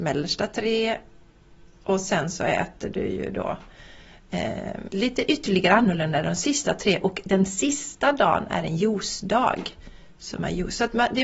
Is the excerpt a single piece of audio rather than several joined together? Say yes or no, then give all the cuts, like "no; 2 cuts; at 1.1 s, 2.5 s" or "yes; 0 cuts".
no; 1 cut; at 4.9 s